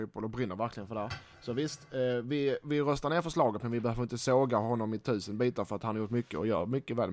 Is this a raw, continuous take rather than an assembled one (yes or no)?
yes